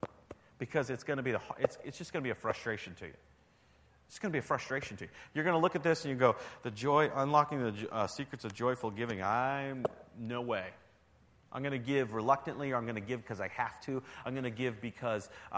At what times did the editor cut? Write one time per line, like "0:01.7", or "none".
none